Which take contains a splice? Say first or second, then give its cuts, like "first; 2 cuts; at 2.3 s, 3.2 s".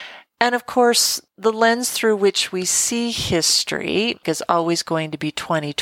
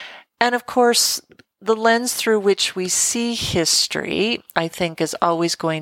first; 2 cuts; at 1.3 s, 4.2 s